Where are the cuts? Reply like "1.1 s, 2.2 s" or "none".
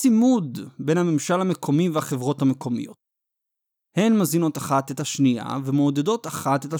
none